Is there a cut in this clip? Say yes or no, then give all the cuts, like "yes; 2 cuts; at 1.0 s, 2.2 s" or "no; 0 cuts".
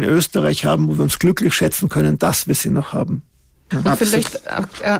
yes; 1 cut; at 3.7 s